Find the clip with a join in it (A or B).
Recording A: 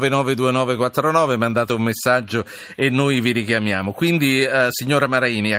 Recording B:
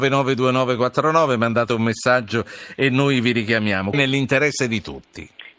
B